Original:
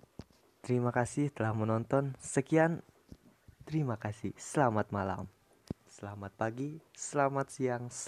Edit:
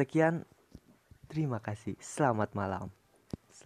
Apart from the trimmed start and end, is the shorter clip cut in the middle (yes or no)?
no